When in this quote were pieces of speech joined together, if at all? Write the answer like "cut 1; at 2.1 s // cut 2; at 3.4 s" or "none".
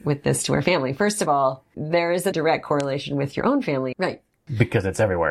cut 1; at 2.3 s // cut 2; at 3.9 s